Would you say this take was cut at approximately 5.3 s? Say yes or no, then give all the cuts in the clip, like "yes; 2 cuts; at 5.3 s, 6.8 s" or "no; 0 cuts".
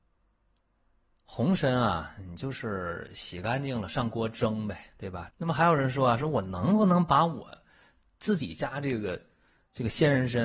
yes; 1 cut; at 5.3 s